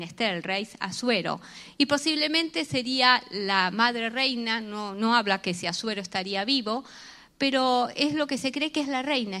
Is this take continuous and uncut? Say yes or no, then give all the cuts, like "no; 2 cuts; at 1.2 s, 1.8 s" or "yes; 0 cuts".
yes; 0 cuts